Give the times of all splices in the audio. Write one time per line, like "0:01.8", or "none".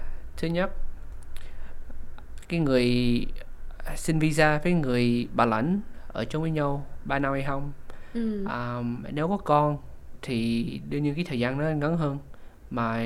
none